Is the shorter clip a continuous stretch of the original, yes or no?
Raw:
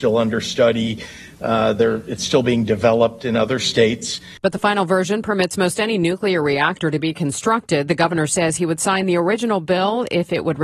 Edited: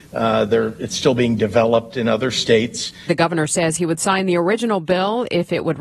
no